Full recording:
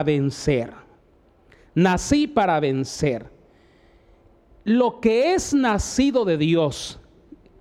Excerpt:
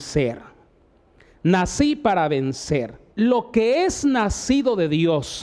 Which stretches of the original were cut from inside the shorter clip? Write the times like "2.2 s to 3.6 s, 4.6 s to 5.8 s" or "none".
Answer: 3.4 s to 4.6 s